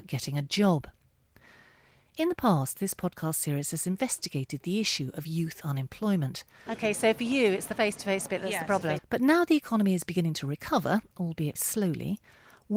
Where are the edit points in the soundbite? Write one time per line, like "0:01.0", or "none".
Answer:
0:06.7
0:09.0
0:11.6

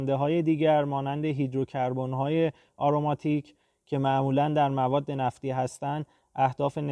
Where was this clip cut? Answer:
none

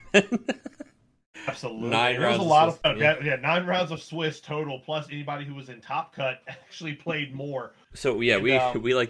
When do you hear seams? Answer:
0:02.8
0:07.8

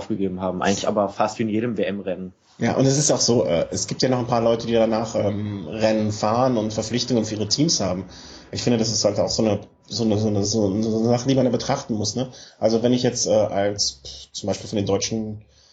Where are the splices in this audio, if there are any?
none

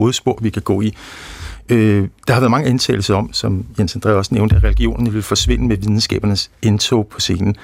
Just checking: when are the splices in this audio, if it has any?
0:02.2

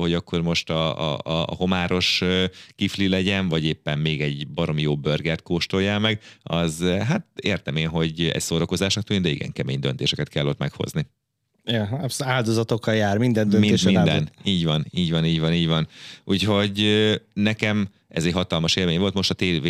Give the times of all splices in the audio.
none

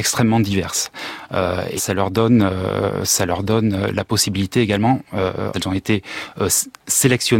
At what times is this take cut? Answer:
0:01.8
0:05.5

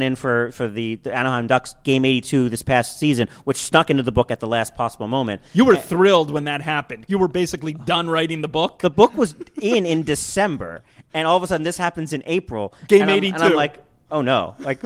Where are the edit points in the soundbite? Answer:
0:07.1

